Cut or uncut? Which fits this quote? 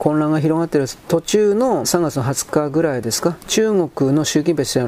cut